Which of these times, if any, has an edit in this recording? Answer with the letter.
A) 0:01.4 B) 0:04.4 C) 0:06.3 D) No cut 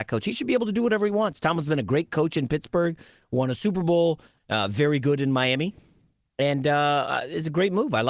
B